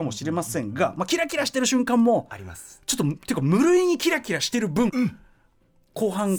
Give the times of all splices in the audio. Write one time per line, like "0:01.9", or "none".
0:04.9